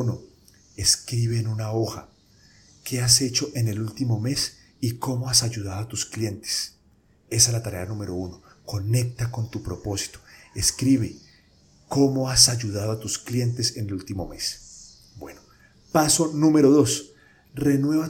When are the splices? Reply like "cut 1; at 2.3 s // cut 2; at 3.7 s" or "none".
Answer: none